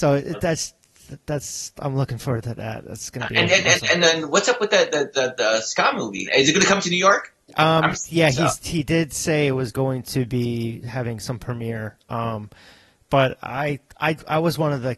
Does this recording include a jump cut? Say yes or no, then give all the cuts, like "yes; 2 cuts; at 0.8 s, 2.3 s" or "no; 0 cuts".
yes; 1 cut; at 6.3 s